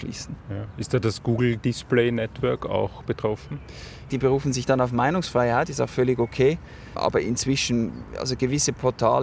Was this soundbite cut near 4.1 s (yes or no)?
yes